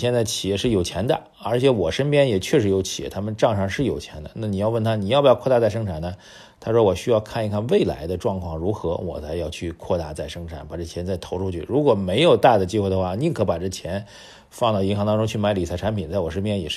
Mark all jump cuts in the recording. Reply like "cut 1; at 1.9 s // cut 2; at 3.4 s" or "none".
none

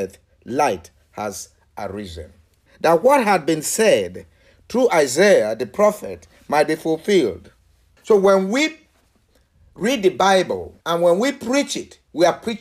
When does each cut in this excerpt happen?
cut 1; at 2.7 s // cut 2; at 8.0 s // cut 3; at 10.8 s

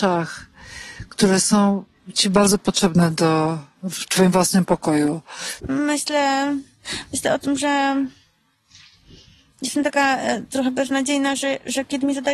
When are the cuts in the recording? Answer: cut 1; at 5.6 s

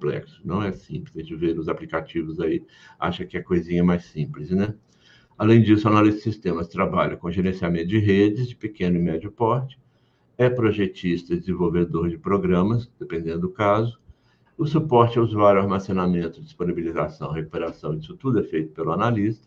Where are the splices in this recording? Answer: cut 1; at 14.5 s

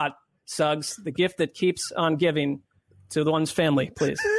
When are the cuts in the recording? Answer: none

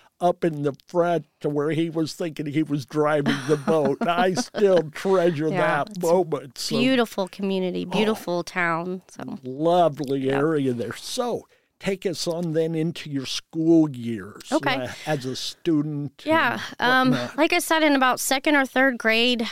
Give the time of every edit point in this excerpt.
none

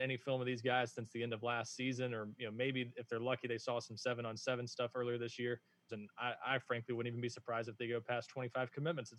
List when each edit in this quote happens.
cut 1; at 5.9 s

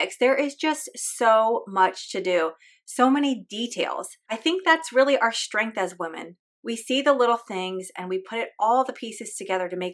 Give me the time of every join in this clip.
cut 1; at 4.3 s

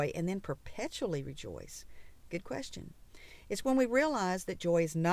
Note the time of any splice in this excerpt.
none

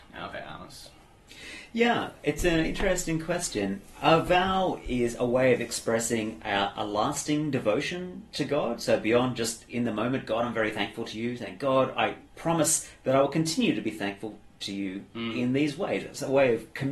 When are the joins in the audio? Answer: cut 1; at 12.3 s

